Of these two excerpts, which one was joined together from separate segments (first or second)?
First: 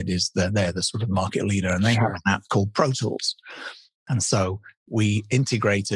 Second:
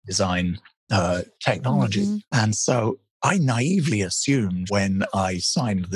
second